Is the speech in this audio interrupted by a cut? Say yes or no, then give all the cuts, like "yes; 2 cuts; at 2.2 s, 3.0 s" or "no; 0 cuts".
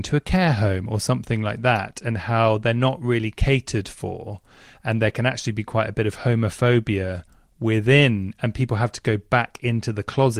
no; 0 cuts